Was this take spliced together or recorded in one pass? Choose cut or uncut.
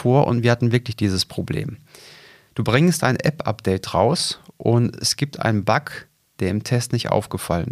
uncut